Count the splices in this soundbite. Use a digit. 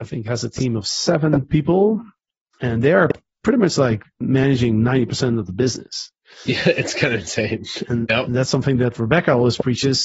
1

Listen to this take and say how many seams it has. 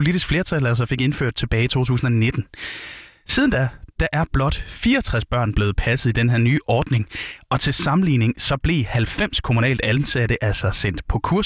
0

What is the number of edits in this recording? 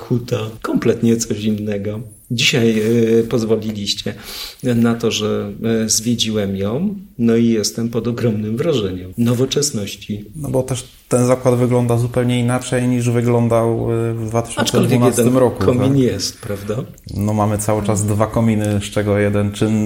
0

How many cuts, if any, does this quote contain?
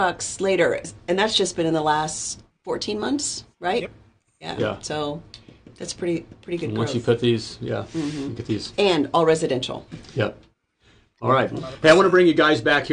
1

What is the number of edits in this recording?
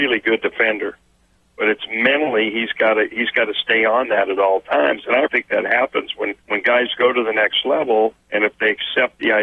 2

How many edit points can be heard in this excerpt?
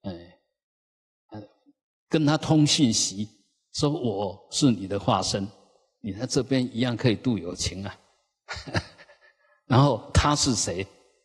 0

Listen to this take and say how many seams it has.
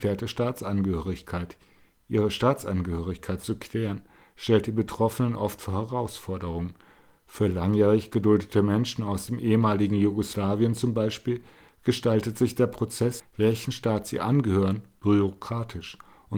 2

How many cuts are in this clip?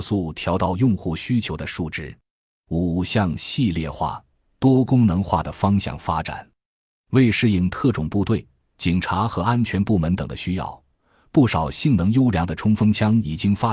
1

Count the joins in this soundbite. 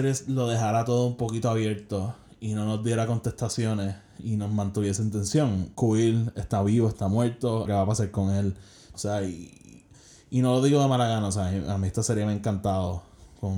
2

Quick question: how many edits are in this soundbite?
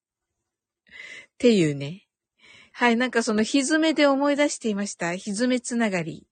1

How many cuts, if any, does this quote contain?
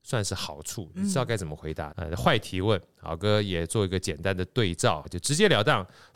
2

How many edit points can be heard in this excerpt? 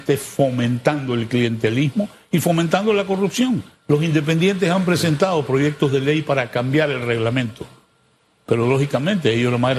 1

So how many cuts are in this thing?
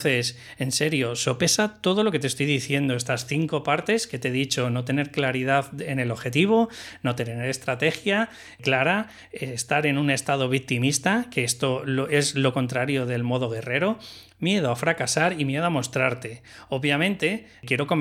0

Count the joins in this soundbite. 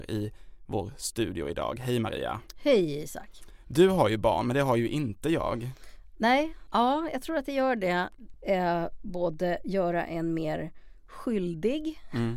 2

